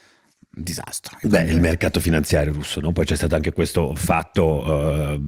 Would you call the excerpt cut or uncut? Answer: uncut